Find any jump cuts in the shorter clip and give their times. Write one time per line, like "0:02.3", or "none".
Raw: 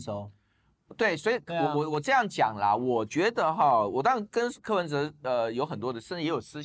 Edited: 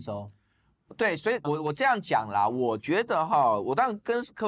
0:01.4